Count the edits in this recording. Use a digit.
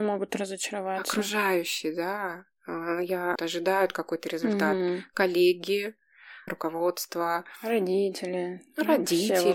2